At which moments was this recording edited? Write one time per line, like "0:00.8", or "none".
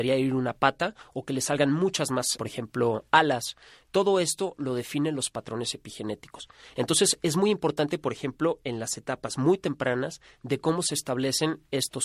0:02.4